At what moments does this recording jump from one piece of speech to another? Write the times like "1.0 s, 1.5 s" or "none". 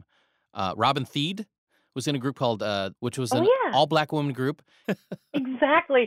2.9 s, 4.8 s